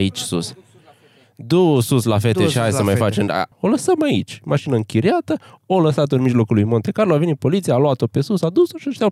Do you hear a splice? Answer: yes; 1 cut; at 3.5 s

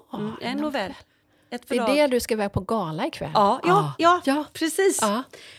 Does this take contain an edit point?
no; 0 cuts

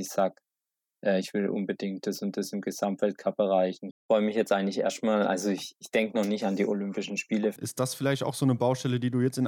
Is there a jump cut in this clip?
yes; 2 cuts; at 3.9 s, 7.6 s

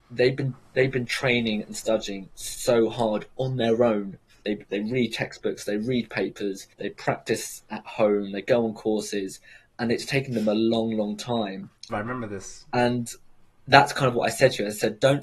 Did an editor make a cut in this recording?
yes; 2 cuts; at 6.7 s, 11.9 s

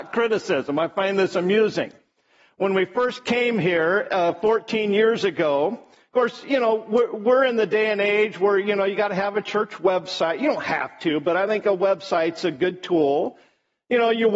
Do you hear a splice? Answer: no; 0 cuts

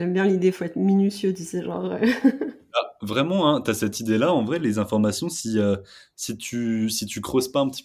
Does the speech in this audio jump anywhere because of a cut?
no; 0 cuts

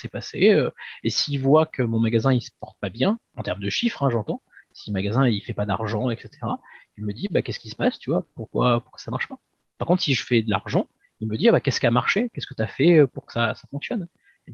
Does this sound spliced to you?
no; 0 cuts

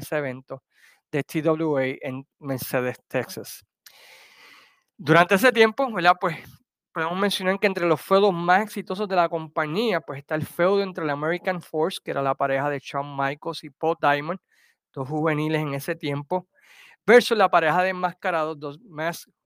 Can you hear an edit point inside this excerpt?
no; 0 cuts

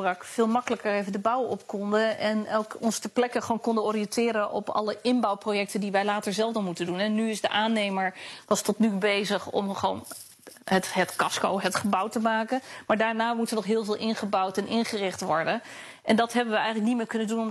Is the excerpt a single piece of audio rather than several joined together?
yes; 0 cuts

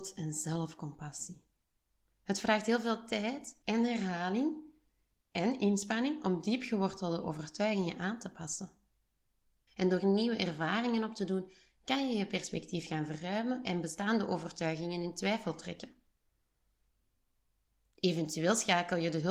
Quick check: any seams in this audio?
yes; 2 cuts; at 3.6 s, 9.7 s

